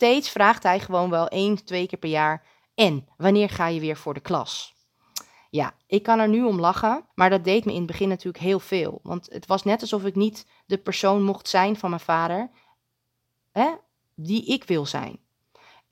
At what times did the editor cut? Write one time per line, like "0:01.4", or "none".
0:07.1